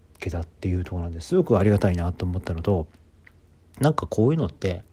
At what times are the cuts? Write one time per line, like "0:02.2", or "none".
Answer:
none